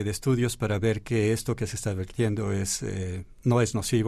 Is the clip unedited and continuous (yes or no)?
yes